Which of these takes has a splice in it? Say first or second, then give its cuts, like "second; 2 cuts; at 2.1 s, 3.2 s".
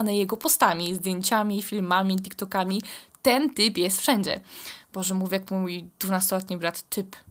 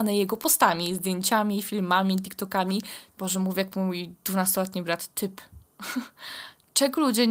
second; 1 cut; at 3.1 s